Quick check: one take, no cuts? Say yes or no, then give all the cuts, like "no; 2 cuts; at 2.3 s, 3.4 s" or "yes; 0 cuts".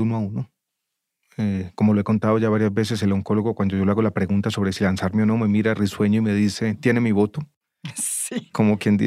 yes; 0 cuts